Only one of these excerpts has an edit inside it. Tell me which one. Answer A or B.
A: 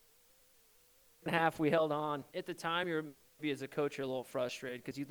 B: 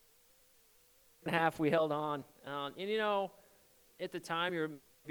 A